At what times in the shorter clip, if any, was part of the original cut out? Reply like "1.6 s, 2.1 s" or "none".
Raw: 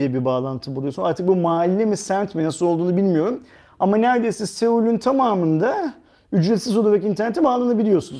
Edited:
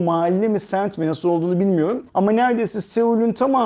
2.1 s

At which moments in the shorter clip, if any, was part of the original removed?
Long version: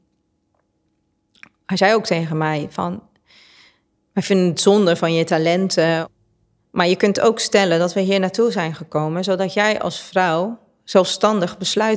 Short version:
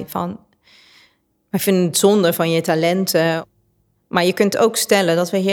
none

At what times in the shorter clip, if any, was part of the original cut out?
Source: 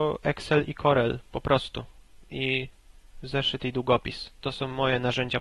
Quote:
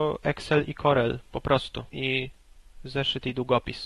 1.9 s

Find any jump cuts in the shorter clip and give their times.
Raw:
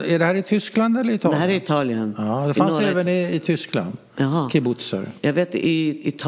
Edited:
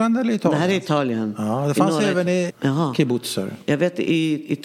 2.5 s

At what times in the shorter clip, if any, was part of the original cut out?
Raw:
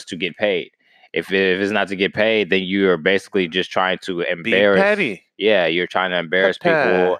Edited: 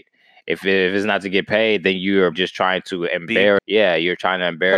2.3 s, 3.6 s

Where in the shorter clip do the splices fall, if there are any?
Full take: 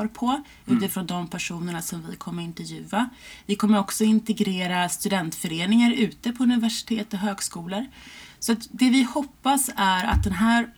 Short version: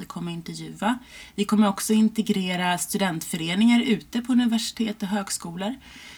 none

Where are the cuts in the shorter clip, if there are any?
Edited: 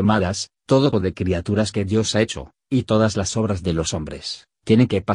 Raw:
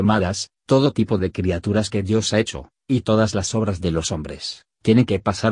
0.9 s

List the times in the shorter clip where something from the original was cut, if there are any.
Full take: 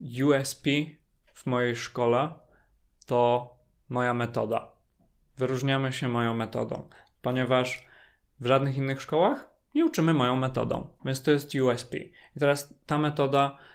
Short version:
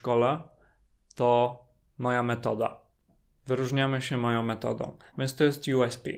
5.1 s

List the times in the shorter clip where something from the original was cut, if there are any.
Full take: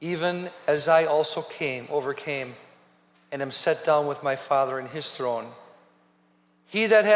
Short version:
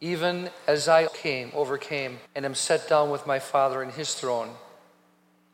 1.1 s, 2.3 s

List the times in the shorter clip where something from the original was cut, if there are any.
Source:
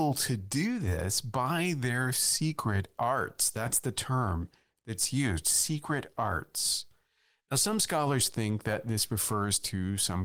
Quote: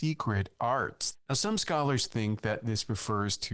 1.1 s

